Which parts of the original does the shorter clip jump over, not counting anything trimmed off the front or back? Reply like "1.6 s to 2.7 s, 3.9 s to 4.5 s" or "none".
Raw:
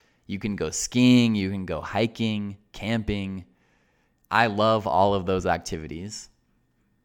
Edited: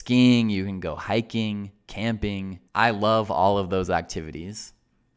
3.5 s to 4.2 s